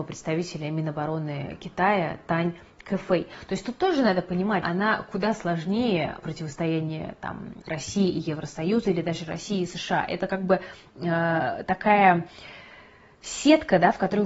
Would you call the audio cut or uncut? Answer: cut